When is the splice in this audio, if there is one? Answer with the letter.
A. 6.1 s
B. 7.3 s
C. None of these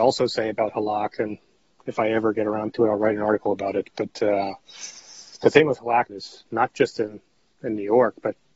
A